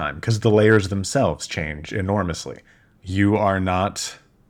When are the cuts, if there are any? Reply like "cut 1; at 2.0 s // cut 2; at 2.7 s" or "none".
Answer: cut 1; at 3.0 s